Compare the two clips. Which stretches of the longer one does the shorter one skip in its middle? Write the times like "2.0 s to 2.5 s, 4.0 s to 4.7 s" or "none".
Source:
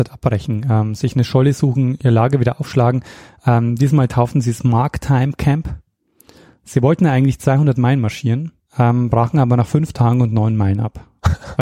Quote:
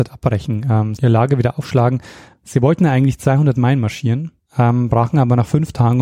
1.0 s to 2.0 s, 3.3 s to 6.5 s